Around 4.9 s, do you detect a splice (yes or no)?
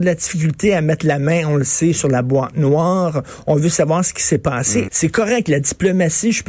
yes